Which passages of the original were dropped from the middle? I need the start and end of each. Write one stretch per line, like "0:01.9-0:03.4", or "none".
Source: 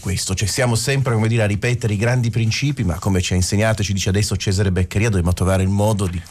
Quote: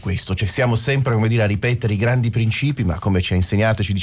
none